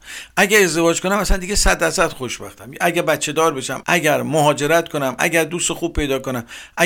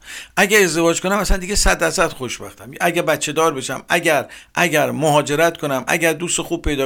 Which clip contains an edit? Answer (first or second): first